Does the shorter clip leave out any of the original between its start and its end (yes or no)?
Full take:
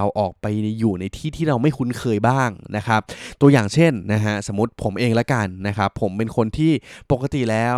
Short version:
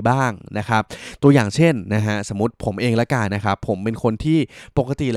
yes